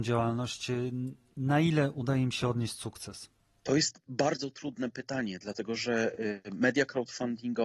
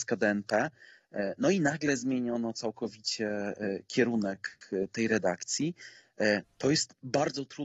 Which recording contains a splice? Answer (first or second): second